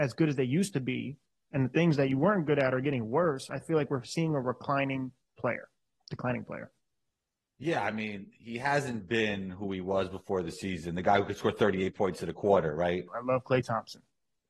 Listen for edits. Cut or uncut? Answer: cut